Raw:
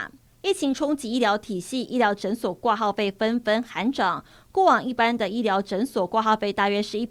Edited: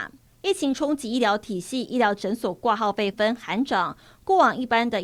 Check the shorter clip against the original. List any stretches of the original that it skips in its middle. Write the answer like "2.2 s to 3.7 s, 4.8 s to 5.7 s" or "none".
3.1 s to 3.4 s